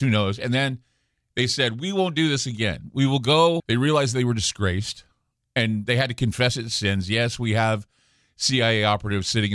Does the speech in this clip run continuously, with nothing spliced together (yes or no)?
no